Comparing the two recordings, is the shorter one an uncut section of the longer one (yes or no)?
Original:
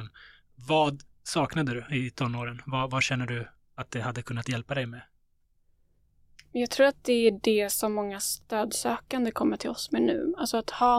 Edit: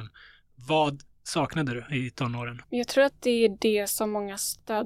no